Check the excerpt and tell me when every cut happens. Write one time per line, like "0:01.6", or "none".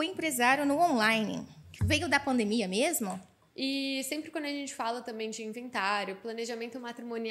0:01.8
0:03.5